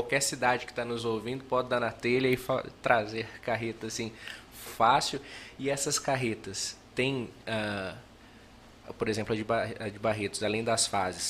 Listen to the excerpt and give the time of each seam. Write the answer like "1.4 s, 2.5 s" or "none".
4.7 s

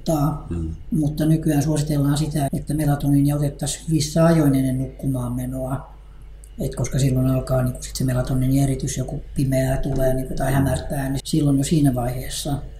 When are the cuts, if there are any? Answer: 2.5 s, 11.2 s

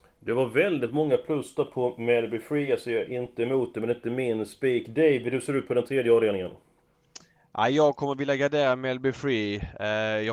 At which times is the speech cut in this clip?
none

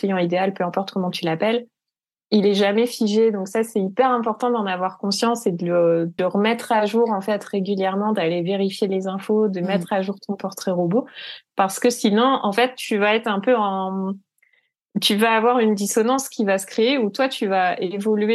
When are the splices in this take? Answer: 6.2 s

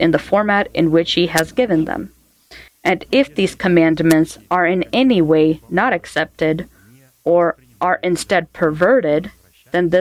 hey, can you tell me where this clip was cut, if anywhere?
2.7 s

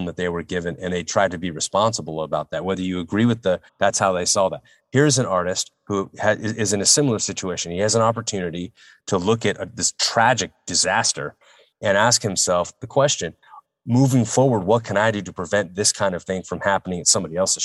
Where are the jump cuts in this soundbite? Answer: 3.7 s

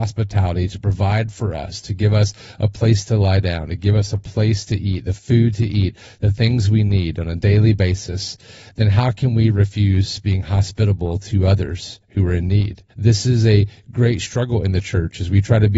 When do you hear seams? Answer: 12.9 s

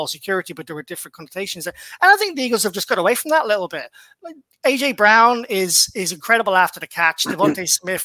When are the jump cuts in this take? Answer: none

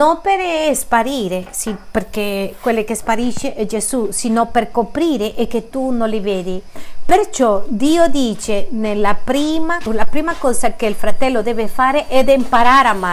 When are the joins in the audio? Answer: 9.9 s

